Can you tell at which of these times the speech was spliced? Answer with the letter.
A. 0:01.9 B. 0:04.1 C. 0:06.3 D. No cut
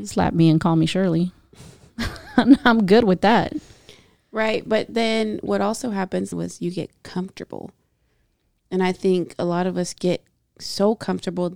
C